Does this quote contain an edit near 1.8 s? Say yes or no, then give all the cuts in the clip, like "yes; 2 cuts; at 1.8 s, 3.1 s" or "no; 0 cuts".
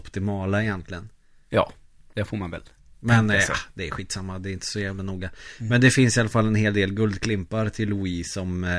no; 0 cuts